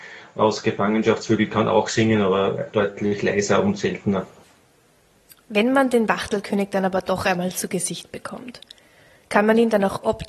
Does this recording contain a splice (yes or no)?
no